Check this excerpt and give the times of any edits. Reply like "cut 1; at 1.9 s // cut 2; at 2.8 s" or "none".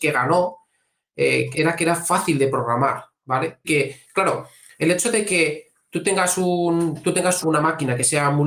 cut 1; at 1.5 s // cut 2; at 3.6 s // cut 3; at 7.4 s